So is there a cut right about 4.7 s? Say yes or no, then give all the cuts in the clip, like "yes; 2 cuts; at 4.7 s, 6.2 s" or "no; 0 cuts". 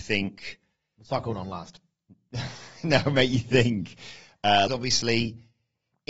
yes; 1 cut; at 4.7 s